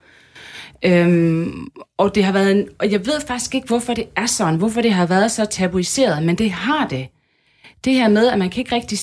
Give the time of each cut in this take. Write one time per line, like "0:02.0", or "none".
none